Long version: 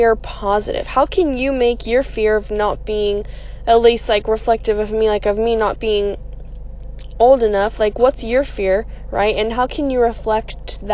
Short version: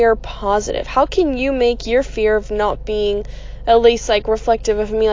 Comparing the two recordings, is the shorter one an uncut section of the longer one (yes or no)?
yes